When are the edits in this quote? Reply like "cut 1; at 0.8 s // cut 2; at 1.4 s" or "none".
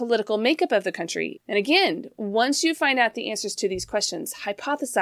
cut 1; at 1.4 s